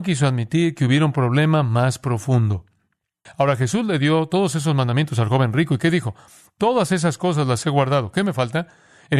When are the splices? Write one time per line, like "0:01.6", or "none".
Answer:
0:03.3